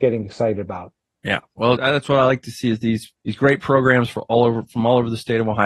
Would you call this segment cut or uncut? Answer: cut